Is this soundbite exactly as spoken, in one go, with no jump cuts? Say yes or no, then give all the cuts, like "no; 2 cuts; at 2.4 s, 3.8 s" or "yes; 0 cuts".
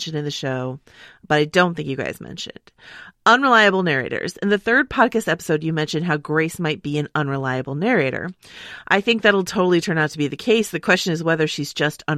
yes; 0 cuts